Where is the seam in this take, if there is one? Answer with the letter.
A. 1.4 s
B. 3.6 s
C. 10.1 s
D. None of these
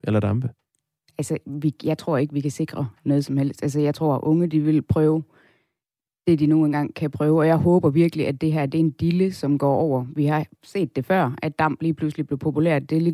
D